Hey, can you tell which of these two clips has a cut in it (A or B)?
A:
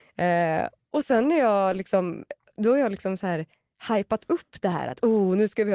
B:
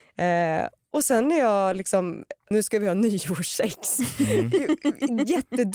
B